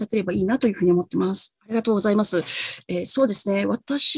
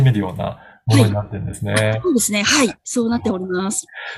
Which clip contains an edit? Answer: first; 1 cut; at 1.6 s

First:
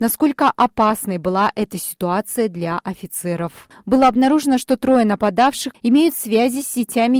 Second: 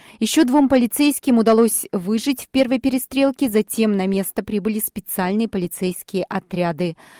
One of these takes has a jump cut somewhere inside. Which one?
first; 2 cuts; at 3.7 s, 5.7 s

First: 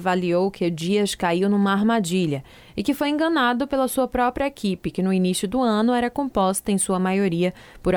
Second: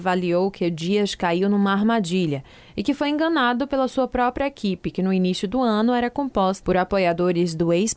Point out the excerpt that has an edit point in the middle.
second; 1 cut; at 6.6 s

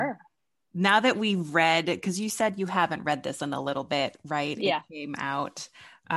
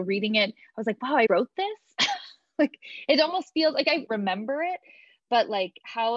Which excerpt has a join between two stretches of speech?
second; 2 cuts; at 1.3 s, 4.1 s

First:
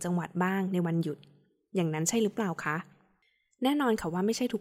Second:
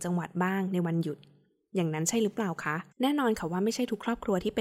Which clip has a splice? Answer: second; 1 cut; at 2.9 s

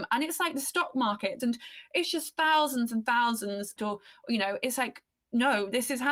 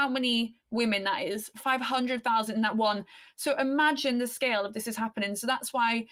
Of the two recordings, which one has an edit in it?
first; 2 cuts; at 1.4 s, 3.8 s

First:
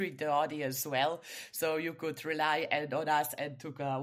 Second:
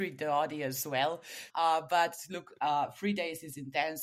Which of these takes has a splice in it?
second; 1 cut; at 1.5 s

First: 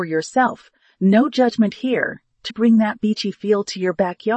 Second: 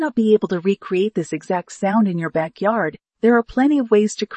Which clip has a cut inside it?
first; 1 cut; at 2.5 s

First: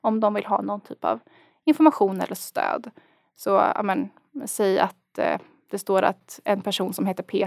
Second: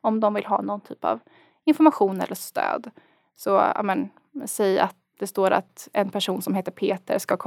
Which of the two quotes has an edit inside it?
second; 1 cut; at 5.1 s

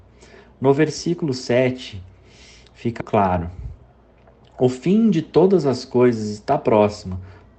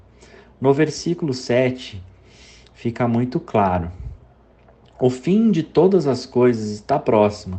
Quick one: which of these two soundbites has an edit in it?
first; 1 cut; at 3.0 s

